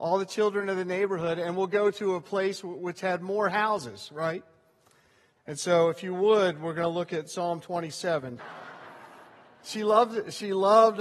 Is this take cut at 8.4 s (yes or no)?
yes